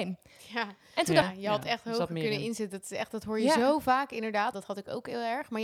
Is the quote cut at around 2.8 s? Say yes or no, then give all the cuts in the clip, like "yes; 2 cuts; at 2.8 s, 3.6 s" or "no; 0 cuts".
no; 2 cuts; at 1.2 s, 4.5 s